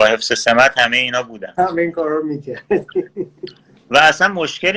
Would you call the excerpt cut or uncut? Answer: uncut